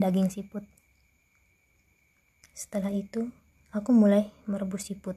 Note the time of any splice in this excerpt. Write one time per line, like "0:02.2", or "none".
0:02.4

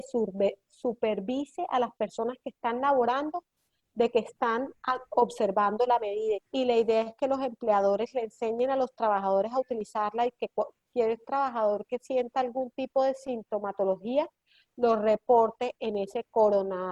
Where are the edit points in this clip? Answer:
0:06.3

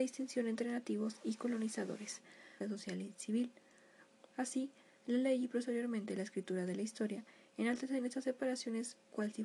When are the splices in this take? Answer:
0:02.6
0:04.3

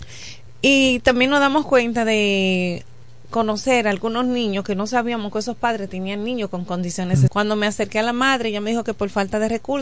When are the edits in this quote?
0:07.3

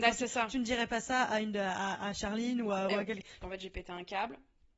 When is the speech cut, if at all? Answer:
0:03.4

